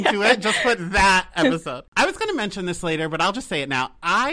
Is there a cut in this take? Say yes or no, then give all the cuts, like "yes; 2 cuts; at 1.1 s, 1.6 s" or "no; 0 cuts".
yes; 1 cut; at 1.9 s